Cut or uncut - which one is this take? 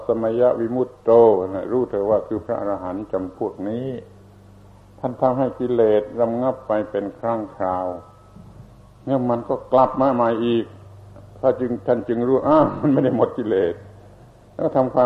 uncut